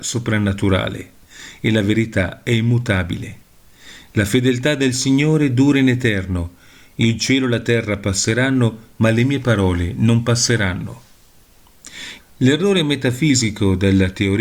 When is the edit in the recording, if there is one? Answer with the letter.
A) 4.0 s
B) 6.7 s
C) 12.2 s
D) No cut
C